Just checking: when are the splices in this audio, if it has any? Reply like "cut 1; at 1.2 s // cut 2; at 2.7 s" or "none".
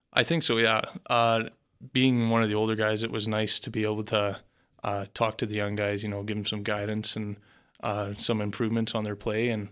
none